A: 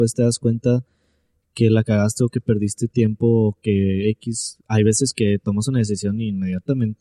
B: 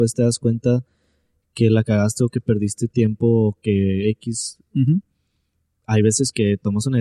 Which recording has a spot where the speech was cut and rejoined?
A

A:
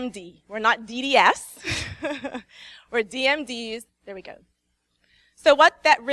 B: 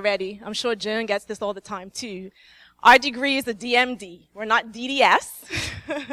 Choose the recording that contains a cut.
A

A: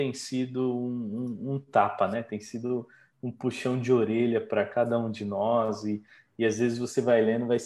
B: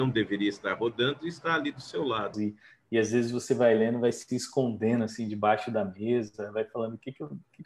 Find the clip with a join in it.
B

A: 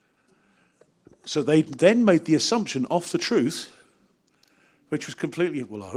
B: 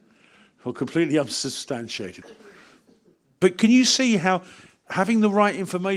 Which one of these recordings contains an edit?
B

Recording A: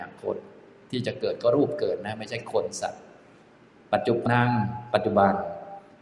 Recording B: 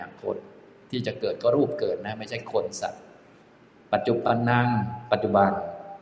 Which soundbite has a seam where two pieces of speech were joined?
A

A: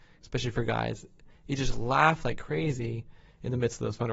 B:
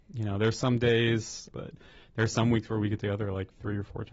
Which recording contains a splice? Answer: B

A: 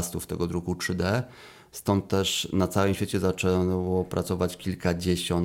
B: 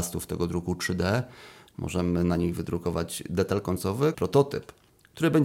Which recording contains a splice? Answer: B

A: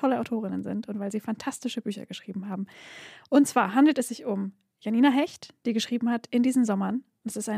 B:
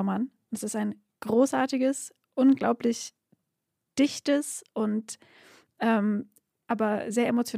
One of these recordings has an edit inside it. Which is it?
B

